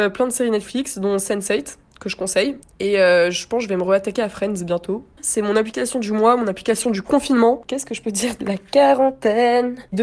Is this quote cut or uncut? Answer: cut